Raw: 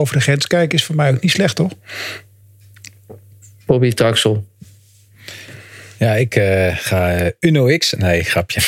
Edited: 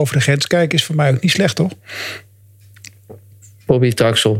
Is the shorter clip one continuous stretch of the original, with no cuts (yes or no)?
yes